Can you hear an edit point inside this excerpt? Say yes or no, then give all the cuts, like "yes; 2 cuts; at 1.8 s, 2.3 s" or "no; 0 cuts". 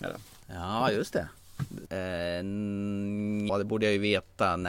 yes; 2 cuts; at 1.9 s, 3.5 s